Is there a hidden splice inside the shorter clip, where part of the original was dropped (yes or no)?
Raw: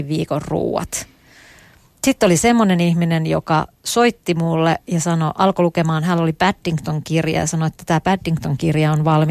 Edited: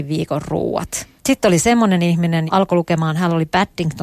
yes